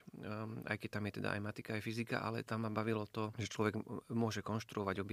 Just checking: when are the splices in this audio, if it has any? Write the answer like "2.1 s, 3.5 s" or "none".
none